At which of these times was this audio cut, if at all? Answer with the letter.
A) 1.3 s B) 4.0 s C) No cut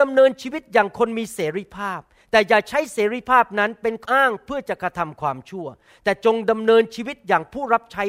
B